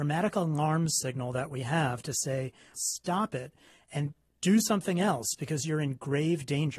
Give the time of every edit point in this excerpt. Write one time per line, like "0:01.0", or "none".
0:02.7